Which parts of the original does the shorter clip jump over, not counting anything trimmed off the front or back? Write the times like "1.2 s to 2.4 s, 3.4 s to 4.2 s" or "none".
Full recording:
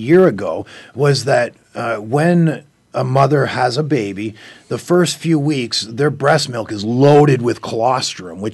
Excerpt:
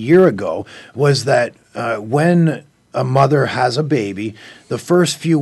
none